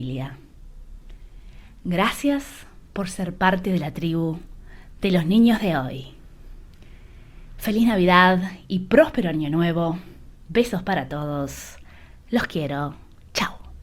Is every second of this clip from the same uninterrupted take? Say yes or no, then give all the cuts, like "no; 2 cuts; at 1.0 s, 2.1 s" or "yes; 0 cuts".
yes; 0 cuts